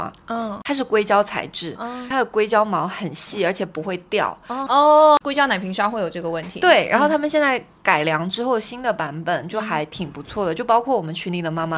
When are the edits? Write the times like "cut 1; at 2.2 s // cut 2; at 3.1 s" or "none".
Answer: cut 1; at 4.7 s